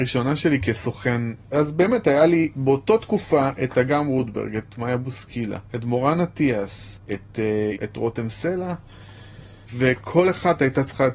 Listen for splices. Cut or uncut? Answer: cut